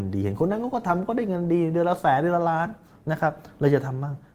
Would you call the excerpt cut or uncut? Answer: uncut